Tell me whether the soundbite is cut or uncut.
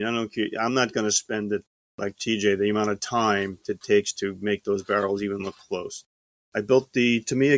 cut